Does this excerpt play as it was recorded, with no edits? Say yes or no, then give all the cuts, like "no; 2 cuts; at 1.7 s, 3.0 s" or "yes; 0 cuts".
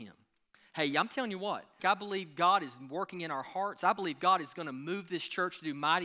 no; 1 cut; at 1.8 s